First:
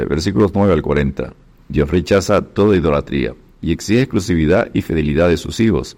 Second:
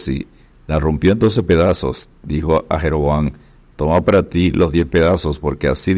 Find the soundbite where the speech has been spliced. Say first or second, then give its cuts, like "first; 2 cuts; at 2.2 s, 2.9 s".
first; 1 cut; at 1.6 s